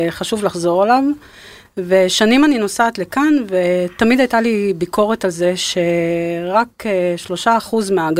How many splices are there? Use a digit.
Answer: 0